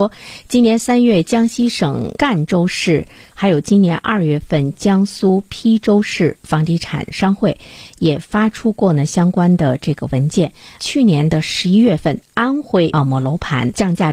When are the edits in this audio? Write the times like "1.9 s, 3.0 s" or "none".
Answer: 3.3 s